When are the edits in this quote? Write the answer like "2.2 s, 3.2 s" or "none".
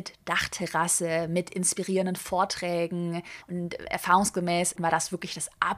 3.4 s, 4.8 s